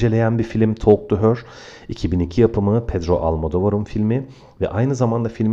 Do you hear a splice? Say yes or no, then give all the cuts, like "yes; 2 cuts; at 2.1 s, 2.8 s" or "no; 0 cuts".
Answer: no; 0 cuts